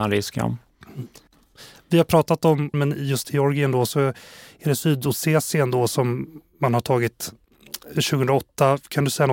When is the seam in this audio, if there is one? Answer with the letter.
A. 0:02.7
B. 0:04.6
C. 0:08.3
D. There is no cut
A